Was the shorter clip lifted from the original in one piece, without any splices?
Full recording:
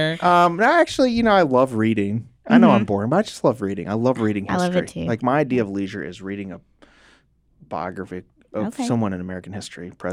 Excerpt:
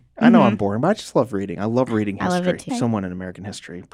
no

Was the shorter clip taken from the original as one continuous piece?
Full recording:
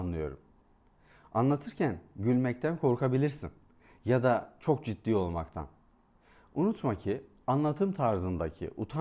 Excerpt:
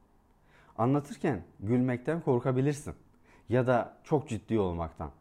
yes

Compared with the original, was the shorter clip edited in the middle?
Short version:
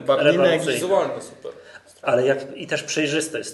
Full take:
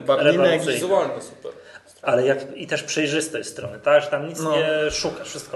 no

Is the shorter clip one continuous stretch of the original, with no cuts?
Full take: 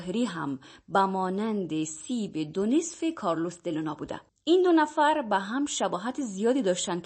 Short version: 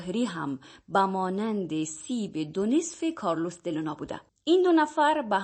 yes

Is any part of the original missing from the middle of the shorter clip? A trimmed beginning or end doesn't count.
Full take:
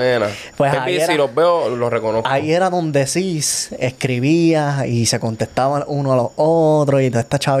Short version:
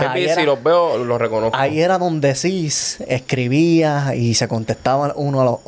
no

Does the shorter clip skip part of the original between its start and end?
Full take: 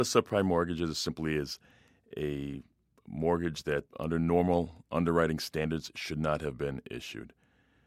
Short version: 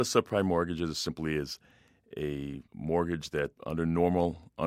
yes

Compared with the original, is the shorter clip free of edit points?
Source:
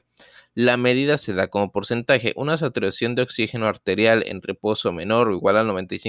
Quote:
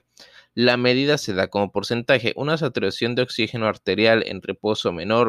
yes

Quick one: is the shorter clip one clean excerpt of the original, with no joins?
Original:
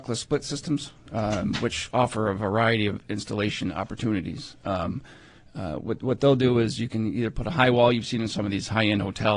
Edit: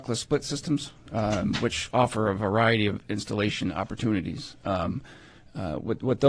yes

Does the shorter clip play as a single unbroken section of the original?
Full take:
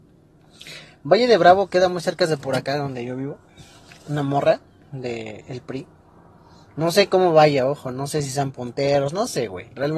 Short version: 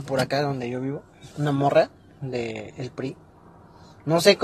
no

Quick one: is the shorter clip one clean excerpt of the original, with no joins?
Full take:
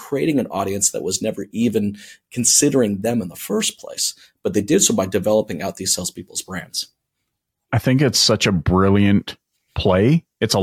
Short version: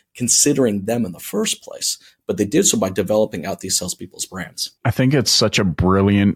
no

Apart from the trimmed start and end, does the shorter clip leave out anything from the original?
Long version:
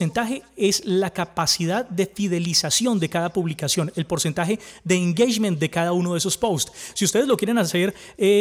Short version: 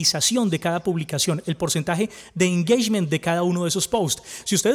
no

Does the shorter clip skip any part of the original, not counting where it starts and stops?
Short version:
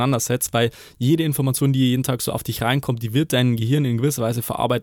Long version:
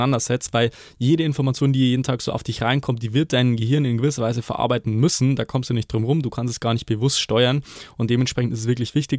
no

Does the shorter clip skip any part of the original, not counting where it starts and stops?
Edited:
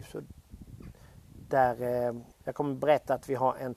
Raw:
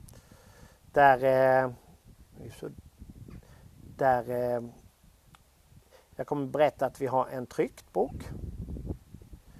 yes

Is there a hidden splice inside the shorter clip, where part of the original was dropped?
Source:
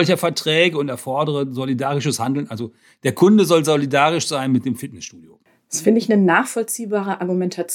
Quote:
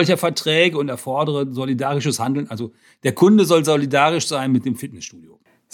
no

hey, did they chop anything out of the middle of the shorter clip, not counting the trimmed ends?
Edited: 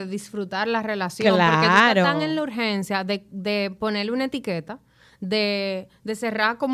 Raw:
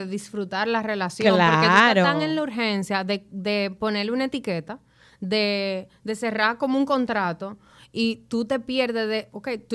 no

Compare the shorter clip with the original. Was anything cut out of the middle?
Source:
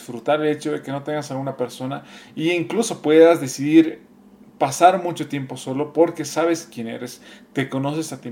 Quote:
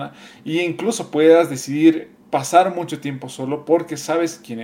yes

